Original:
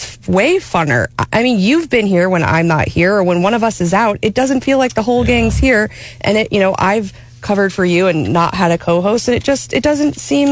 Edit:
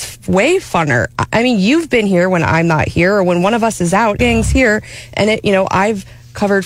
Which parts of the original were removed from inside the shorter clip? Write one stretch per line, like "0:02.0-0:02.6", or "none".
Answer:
0:04.2-0:05.3

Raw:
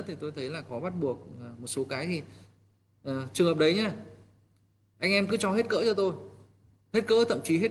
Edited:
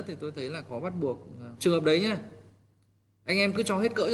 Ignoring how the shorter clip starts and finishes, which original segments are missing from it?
0:01.6-0:03.3

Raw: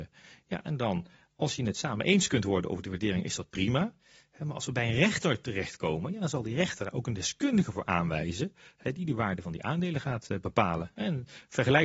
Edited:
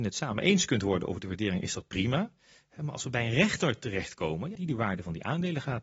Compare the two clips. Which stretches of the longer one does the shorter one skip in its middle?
0:06.2-0:08.9

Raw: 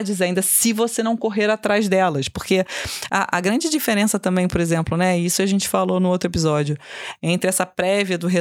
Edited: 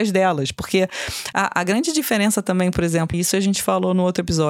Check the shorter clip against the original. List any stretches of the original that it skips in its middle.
0:04.9-0:05.2

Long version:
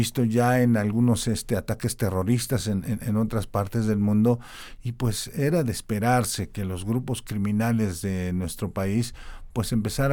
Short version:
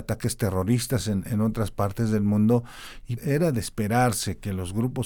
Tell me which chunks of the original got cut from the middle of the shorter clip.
0:02.8-0:03.0
0:04.9-0:05.3

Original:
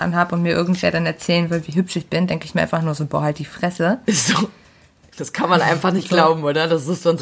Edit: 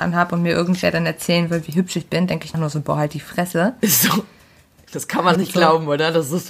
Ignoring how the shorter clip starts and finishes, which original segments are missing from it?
0:02.5-0:02.8
0:05.6-0:05.9

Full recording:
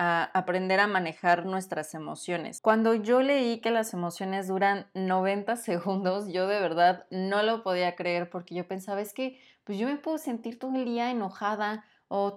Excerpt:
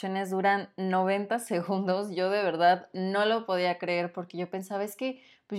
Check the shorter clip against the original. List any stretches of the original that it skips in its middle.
none

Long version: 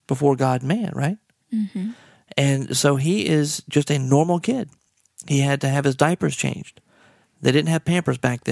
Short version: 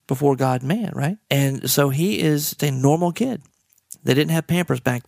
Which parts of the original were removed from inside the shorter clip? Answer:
0:01.3-0:02.3
0:03.6-0:03.8
0:05.2-0:07.3

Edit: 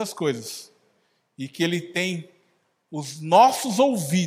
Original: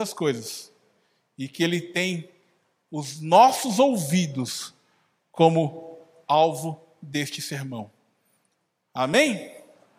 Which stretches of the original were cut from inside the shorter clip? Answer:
none

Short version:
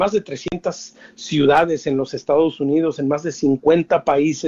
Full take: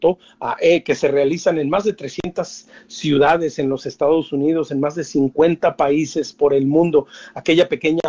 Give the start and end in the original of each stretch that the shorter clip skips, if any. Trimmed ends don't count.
none

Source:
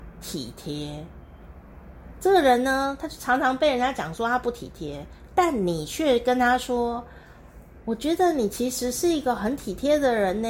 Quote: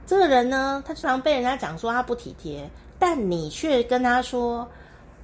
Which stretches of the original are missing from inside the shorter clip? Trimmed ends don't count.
0:03.2-0:03.4

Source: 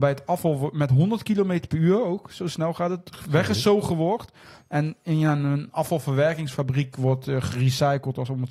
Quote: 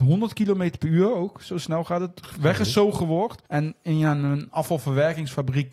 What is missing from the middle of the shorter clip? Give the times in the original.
0:04.3-0:04.7

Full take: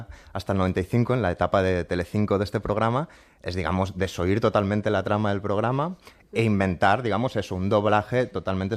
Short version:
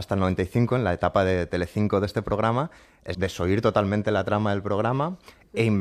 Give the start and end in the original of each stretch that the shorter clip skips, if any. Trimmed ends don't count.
0:03.5-0:03.9

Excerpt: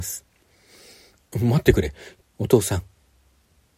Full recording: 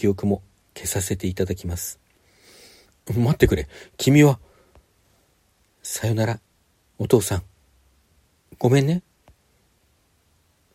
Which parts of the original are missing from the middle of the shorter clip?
0:04.0-0:06.8

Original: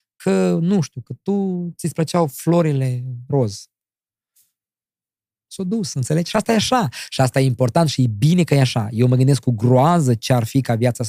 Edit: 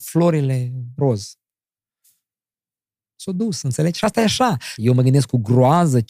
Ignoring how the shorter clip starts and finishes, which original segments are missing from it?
0:07.1-0:08.9

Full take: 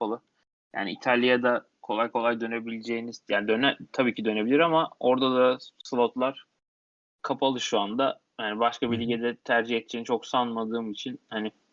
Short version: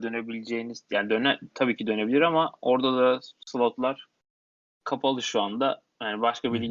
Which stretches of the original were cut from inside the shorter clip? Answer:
none

